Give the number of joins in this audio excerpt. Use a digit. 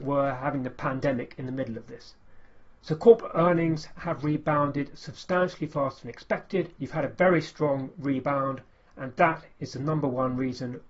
1